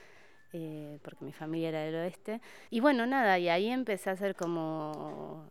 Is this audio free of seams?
no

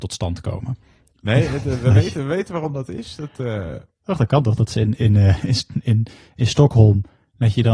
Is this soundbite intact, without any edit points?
yes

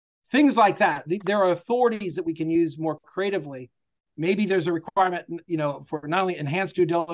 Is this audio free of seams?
no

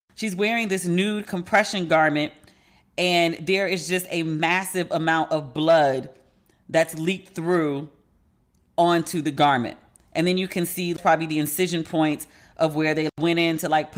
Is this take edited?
no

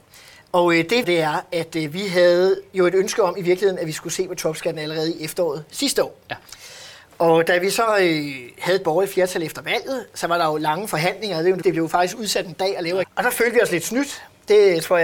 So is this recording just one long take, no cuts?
no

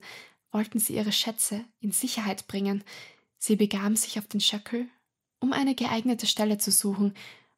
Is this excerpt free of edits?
yes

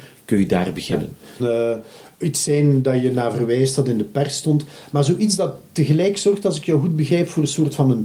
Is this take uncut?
no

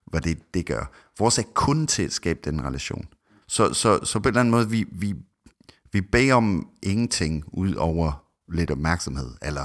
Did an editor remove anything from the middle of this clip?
yes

